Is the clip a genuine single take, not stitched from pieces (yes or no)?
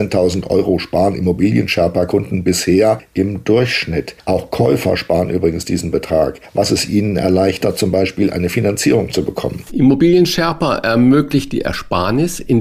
no